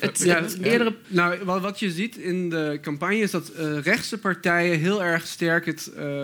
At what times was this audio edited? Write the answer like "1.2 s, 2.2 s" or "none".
1.0 s